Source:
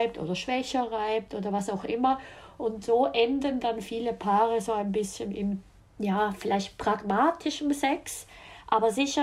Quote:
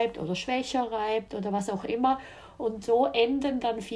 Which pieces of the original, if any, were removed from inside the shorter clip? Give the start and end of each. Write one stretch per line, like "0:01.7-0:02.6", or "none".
none